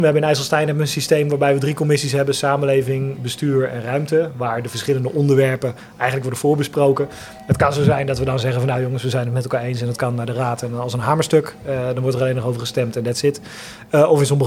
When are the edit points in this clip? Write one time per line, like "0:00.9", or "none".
none